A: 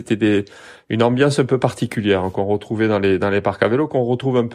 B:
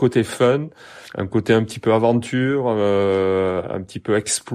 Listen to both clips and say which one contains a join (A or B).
B